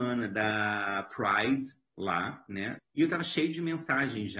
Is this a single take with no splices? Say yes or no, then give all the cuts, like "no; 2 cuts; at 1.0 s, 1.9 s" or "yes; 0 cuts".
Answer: no; 1 cut; at 2.8 s